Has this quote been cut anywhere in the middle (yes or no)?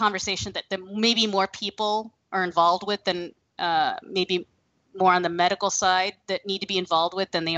no